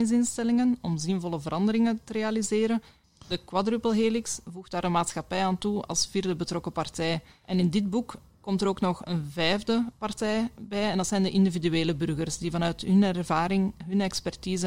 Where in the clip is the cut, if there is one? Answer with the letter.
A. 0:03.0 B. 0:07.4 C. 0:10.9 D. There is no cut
D